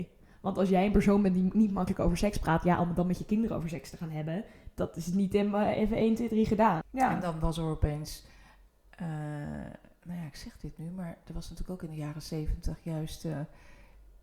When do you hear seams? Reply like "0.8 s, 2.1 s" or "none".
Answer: 6.8 s